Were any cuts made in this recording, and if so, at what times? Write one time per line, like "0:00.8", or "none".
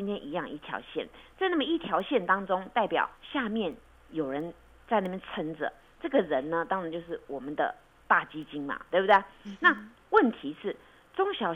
0:03.1